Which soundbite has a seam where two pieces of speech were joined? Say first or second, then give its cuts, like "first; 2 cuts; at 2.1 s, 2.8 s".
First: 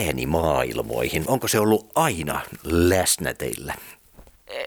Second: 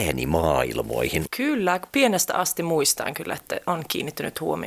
second; 1 cut; at 1.3 s